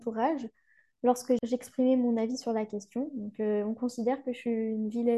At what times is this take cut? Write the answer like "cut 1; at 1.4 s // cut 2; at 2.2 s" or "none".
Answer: none